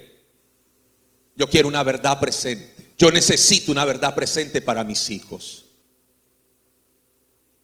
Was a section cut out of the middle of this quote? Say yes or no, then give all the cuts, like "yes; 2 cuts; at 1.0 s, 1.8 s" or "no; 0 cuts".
yes; 1 cut; at 2.9 s